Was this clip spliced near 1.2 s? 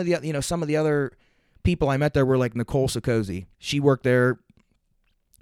no; 1 cut; at 3.5 s

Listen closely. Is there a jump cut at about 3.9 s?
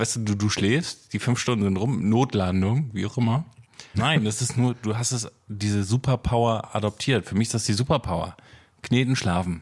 yes; 1 cut; at 3.9 s

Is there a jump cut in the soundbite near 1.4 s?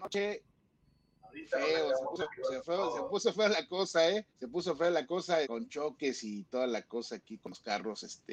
no; 2 cuts; at 4.3 s, 5.4 s

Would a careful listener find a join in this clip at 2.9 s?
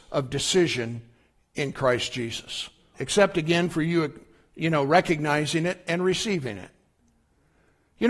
yes; 1 cut; at 2.9 s

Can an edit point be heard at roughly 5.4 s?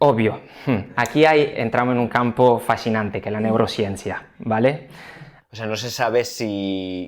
yes; 1 cut; at 5.4 s

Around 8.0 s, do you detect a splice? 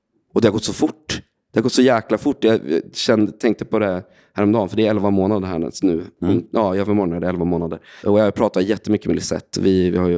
yes; 1 cut; at 8.0 s

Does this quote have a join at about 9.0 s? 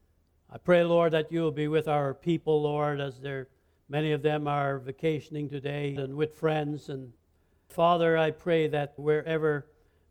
yes; 3 cuts; at 6.0 s, 7.7 s, 9.0 s

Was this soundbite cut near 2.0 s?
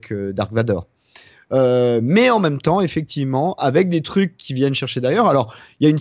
no; 0 cuts

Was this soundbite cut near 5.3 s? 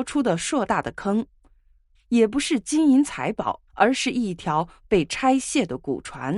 no; 2 cuts; at 1.9 s, 3.7 s

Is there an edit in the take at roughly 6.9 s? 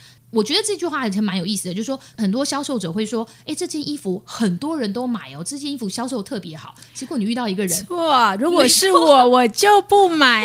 no; 0 cuts

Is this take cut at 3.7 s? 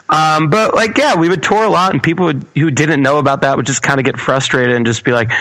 no; 0 cuts

